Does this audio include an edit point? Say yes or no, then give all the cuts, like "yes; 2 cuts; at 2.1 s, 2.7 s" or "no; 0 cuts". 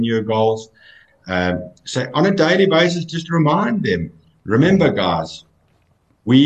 no; 0 cuts